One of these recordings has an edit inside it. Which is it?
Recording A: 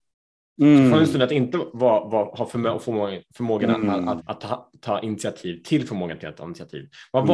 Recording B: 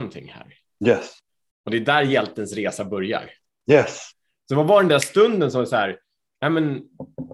A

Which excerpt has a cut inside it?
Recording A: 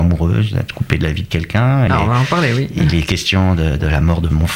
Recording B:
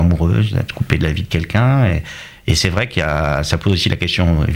A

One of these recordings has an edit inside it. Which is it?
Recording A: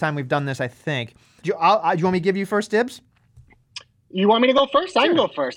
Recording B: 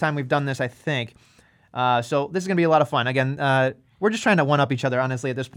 A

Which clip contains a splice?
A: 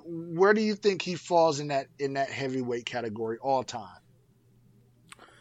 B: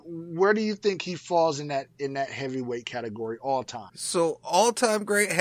B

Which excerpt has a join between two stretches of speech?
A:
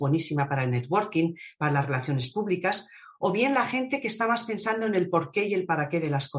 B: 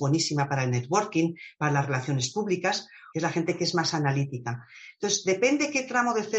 B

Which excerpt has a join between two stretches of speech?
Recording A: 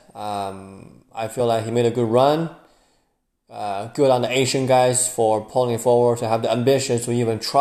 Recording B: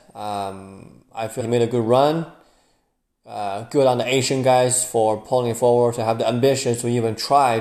B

